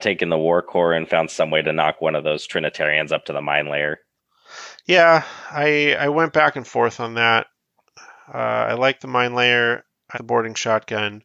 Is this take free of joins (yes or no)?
no